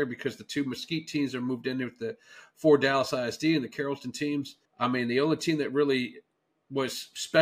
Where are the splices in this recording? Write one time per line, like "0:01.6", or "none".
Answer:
0:04.6